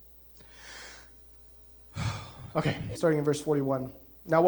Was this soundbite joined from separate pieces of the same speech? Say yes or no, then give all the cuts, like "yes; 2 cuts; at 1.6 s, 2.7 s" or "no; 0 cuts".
yes; 1 cut; at 2.9 s